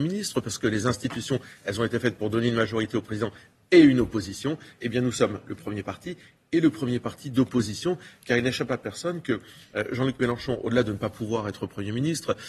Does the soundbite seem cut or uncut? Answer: uncut